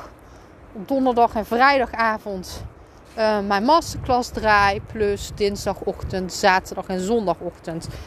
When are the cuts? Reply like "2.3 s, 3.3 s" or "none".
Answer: none